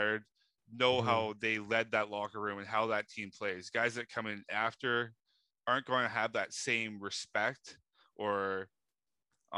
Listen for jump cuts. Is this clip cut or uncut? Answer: uncut